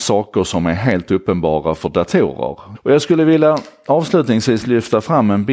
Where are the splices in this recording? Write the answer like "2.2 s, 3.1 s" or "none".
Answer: 2.7 s